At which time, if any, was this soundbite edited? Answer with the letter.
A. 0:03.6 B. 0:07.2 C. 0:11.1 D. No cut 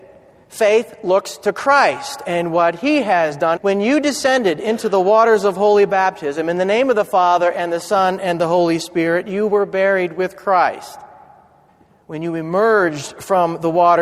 A